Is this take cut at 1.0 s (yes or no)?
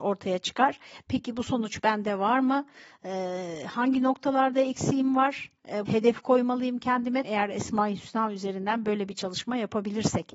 no